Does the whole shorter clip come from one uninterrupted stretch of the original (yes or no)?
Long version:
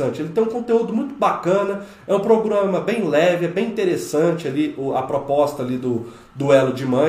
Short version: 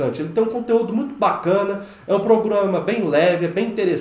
yes